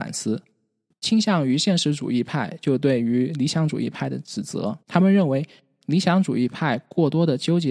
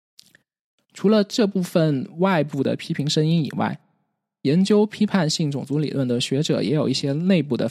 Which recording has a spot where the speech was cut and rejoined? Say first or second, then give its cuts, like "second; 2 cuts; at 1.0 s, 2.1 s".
first; 2 cuts; at 0.9 s, 4.8 s